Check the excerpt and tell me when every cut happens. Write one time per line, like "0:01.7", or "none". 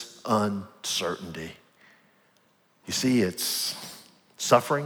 none